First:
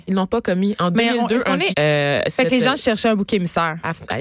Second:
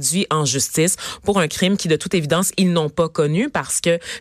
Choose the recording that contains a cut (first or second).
first